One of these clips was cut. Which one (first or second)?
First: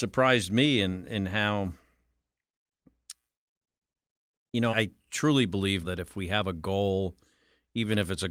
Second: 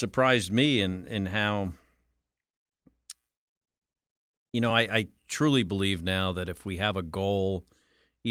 first